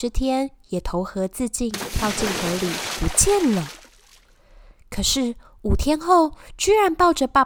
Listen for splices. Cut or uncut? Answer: uncut